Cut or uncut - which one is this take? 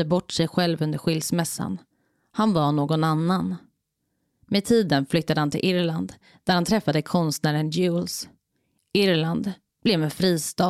uncut